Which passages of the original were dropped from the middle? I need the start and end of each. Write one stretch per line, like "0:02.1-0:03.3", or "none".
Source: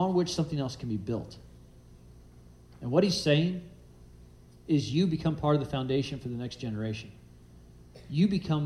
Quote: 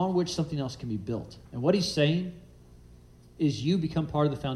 0:01.5-0:02.7